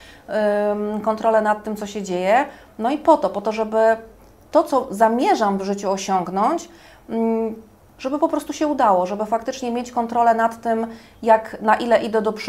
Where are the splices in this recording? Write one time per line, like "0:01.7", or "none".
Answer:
none